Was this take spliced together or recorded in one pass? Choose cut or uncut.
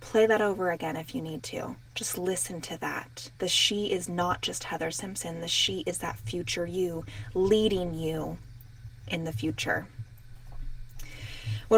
cut